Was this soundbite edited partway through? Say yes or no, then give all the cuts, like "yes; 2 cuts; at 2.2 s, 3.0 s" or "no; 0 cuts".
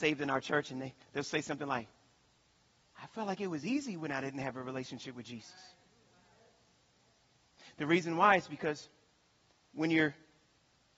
no; 0 cuts